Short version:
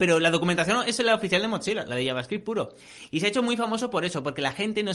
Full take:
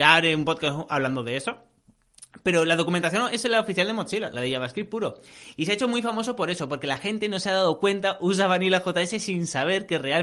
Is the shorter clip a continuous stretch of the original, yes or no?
yes